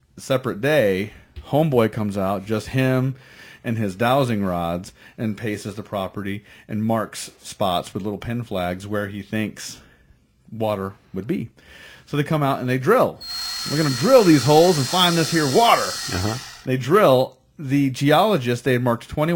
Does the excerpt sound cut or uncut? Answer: uncut